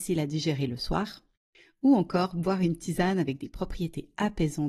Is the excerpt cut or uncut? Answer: uncut